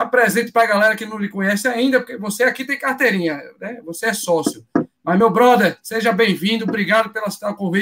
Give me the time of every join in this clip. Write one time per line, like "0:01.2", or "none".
none